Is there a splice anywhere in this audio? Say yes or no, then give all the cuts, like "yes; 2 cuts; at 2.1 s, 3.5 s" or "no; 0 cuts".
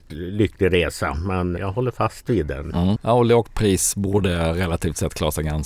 yes; 2 cuts; at 1.6 s, 3.0 s